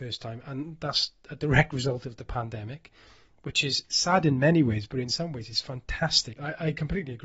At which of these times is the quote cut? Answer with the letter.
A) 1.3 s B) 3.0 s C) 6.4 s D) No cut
C